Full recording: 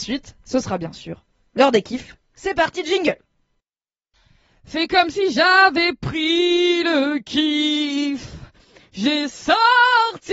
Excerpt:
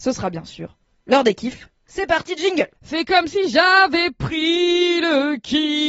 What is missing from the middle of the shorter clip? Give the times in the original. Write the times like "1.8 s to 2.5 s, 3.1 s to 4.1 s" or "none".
3.2 s to 4.6 s